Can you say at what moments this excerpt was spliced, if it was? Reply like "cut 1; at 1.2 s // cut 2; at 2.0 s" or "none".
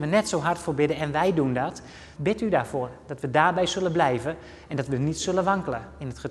cut 1; at 2.2 s